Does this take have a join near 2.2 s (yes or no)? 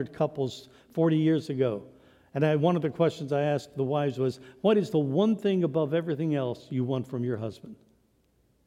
no